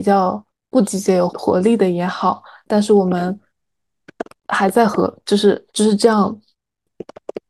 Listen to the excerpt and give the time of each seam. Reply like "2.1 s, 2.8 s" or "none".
1.3 s, 5.7 s